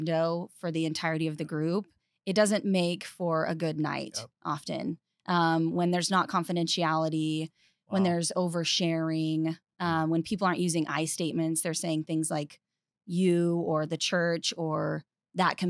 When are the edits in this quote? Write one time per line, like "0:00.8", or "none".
none

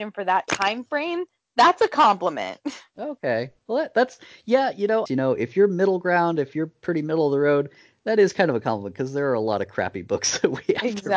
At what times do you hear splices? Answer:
0:05.1

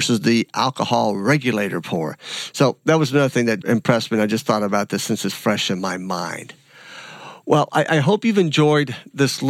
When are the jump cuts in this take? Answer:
0:03.6
0:05.3

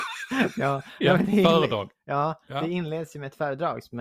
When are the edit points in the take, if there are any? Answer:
none

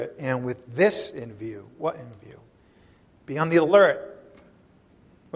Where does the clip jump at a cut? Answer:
none

